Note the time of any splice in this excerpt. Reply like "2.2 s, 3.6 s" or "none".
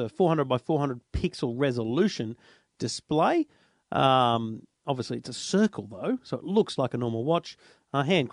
6.8 s